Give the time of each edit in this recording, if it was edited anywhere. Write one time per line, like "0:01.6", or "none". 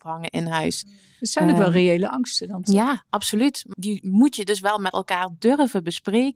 0:03.7